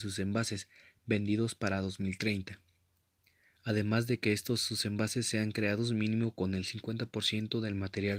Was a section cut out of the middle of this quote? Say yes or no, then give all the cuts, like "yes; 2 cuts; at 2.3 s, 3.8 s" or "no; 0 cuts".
no; 0 cuts